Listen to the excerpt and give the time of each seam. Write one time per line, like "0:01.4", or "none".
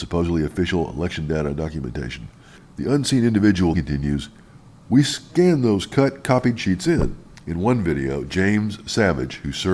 0:03.7
0:07.4